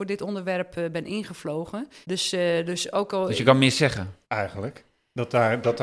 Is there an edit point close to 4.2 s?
yes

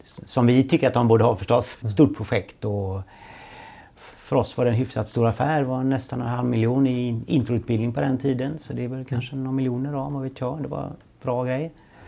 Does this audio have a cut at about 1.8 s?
yes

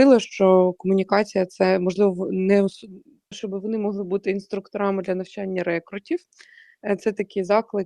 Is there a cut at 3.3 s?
yes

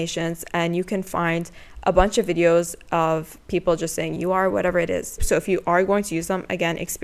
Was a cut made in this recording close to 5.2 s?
yes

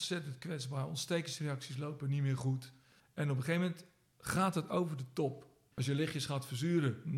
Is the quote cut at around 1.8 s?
no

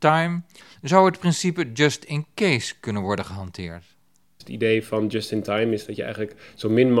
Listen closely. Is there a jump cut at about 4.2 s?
yes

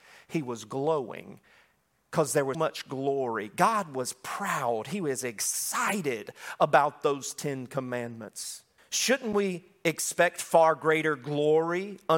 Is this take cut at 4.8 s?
no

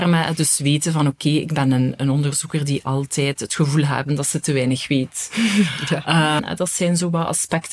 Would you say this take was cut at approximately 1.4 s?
no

